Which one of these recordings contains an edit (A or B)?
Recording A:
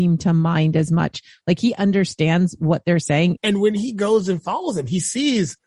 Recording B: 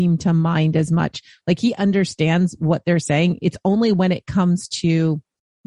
A